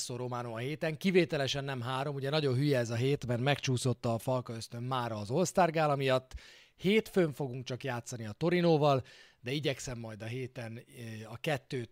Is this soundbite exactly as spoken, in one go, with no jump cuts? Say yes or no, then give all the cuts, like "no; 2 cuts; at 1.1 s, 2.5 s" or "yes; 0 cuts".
yes; 0 cuts